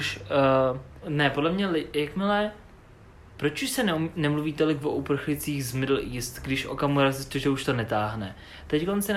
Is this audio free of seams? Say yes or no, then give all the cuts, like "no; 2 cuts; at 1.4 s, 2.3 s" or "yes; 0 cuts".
no; 1 cut; at 1.0 s